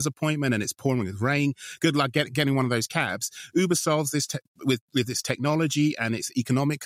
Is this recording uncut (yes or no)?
yes